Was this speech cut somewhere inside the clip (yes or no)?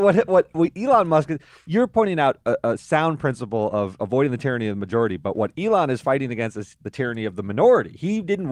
no